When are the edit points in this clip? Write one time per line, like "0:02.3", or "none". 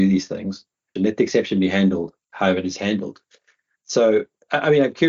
0:01.0
0:02.2